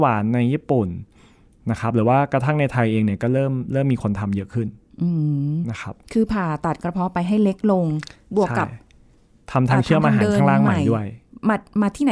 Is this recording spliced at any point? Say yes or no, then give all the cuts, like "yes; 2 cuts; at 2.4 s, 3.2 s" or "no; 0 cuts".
no; 0 cuts